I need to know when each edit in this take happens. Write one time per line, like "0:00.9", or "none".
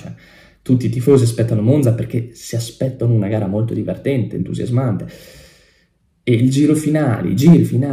none